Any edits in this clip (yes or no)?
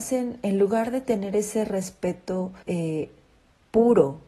yes